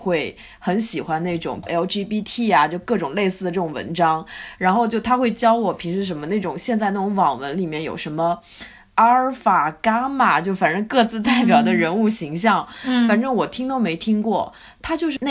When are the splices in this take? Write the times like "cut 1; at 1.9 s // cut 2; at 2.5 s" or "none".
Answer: none